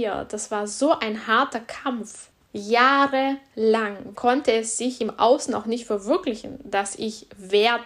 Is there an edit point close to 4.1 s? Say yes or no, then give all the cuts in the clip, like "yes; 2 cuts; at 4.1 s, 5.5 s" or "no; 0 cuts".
yes; 2 cuts; at 2.4 s, 4.1 s